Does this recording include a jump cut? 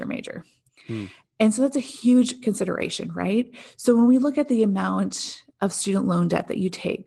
no; 0 cuts

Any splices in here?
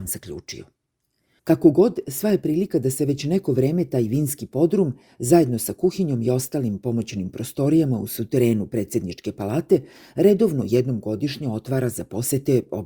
no; 0 cuts

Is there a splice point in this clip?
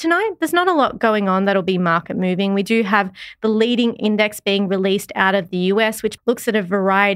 yes; 1 cut; at 6.2 s

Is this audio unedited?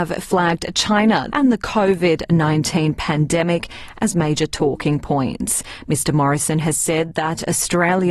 no; 1 cut; at 1.3 s

